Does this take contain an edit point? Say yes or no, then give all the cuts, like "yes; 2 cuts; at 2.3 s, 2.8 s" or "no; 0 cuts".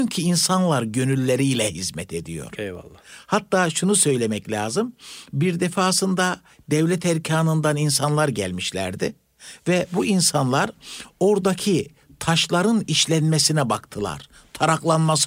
no; 0 cuts